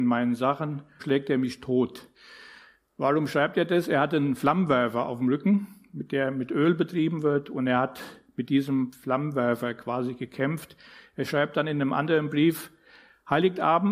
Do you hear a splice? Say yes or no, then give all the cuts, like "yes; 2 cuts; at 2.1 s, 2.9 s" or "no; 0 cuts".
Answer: yes; 1 cut; at 1.0 s